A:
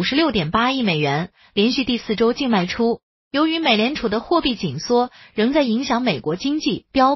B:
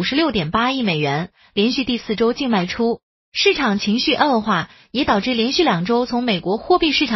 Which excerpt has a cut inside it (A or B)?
A